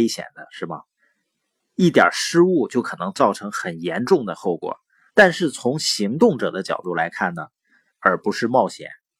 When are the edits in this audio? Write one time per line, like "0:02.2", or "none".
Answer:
0:05.1
0:07.9